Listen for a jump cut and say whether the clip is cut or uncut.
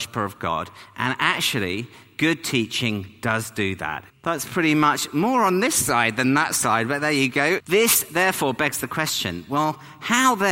cut